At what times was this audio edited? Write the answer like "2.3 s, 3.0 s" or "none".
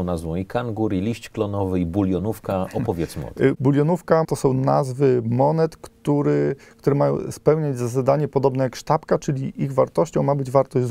4.2 s